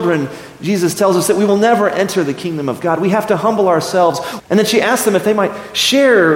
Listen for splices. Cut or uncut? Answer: cut